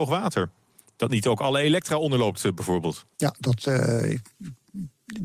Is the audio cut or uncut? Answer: cut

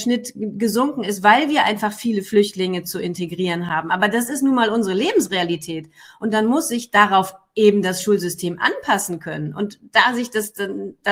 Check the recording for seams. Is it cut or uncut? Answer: uncut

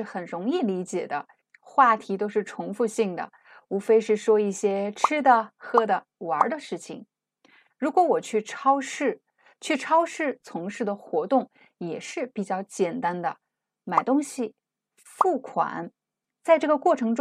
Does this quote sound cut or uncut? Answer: cut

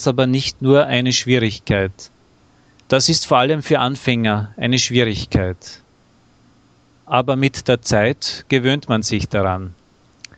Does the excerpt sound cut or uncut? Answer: cut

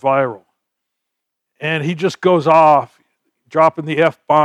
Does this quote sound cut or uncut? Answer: uncut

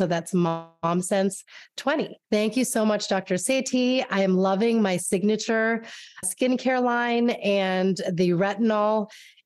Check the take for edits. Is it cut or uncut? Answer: cut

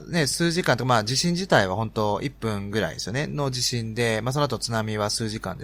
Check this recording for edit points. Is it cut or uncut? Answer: uncut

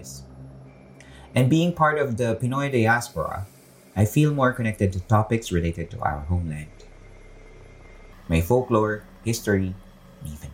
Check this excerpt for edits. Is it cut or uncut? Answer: cut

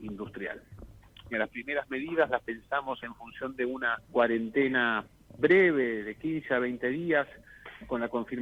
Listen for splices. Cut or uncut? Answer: cut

